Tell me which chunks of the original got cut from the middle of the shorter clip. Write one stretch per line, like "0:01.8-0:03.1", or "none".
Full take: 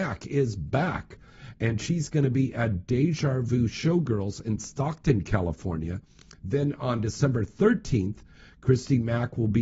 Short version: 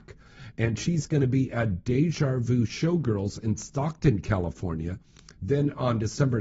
none